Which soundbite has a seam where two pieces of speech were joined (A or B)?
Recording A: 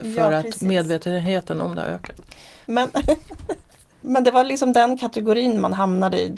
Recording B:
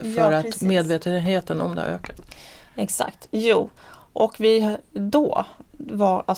A